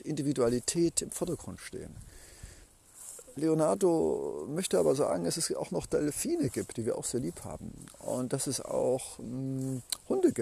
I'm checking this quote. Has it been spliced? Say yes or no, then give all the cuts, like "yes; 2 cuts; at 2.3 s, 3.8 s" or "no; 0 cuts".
no; 0 cuts